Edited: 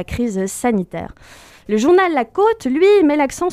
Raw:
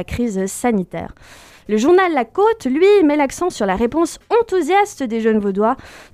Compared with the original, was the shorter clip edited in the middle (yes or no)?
no